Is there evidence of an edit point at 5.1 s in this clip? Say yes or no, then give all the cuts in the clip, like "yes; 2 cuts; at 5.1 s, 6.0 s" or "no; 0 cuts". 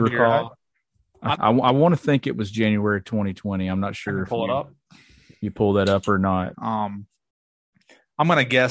no; 2 cuts; at 1.3 s, 6.5 s